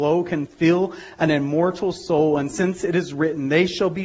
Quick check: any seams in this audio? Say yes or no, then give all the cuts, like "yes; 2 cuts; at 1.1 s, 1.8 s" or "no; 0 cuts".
no; 0 cuts